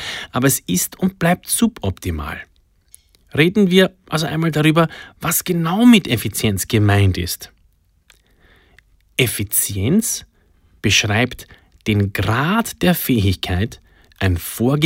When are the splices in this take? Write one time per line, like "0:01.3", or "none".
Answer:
none